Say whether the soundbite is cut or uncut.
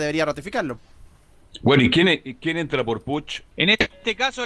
cut